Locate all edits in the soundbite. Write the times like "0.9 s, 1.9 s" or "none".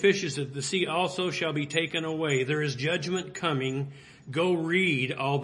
none